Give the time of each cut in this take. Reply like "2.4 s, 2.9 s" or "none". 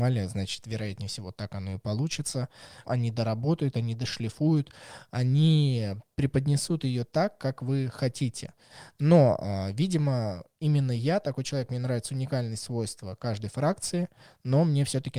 2.9 s

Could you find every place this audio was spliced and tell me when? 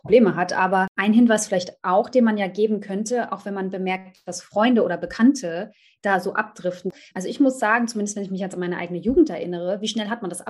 none

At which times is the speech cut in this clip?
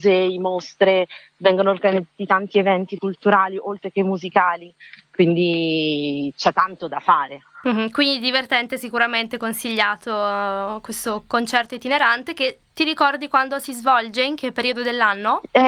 none

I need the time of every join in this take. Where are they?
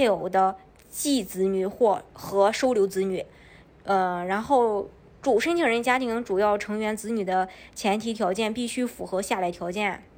none

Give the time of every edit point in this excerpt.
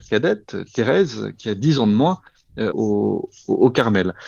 2.7 s

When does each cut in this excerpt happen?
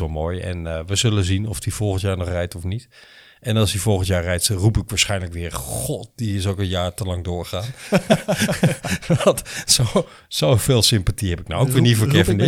none

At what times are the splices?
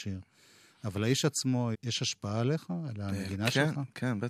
1.7 s

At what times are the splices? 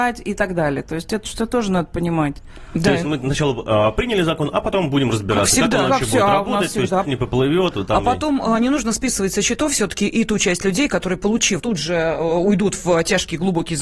7.0 s, 11.6 s

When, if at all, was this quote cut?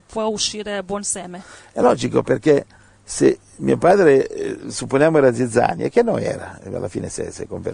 none

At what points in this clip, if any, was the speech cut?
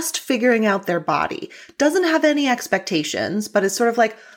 none

